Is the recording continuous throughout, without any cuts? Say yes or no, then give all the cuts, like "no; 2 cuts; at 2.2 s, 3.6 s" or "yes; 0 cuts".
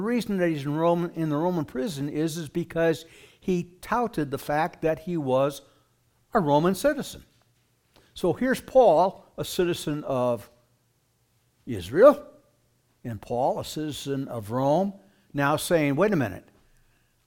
yes; 0 cuts